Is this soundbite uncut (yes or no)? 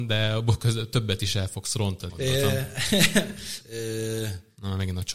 no